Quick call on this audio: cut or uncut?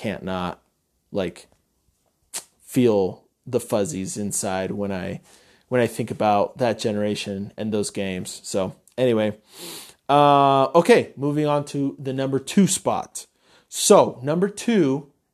uncut